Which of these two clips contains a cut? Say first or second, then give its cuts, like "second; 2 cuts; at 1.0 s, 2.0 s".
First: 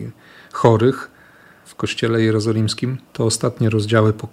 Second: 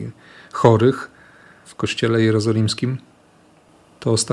first; 1 cut; at 3.1 s